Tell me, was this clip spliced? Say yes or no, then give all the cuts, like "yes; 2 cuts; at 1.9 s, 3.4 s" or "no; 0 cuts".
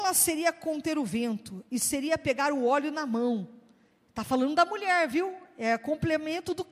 no; 0 cuts